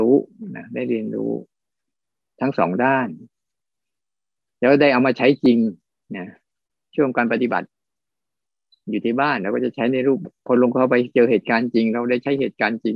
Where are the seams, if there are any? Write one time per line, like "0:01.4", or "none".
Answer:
0:10.2